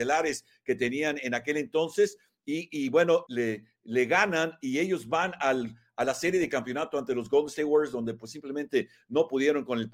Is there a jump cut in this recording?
yes; 1 cut; at 3.3 s

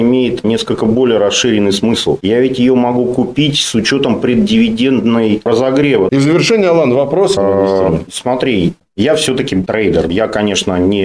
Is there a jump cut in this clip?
yes; 3 cuts; at 2.2 s, 6.1 s, 7.4 s

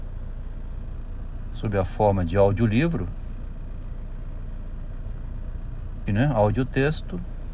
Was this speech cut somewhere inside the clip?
yes; 1 cut; at 6.1 s

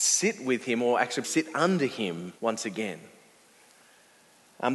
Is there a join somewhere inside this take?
yes; 2 cuts; at 1.2 s, 2.4 s

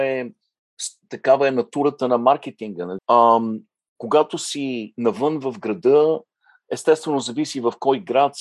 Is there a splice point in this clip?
yes; 1 cut; at 3.0 s

